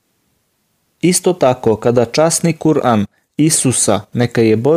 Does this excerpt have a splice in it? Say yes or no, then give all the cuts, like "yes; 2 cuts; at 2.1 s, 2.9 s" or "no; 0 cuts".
no; 0 cuts